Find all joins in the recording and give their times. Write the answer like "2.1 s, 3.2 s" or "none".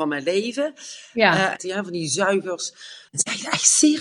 1.6 s, 3.1 s